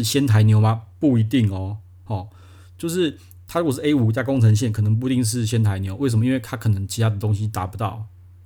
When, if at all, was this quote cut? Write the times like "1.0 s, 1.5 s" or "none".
none